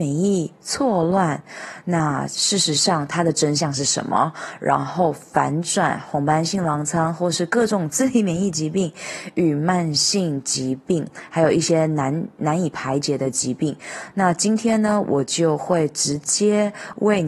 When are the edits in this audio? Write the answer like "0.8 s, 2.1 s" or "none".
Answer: none